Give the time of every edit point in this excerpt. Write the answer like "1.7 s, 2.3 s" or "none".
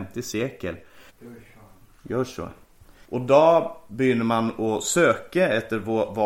1.1 s, 3.0 s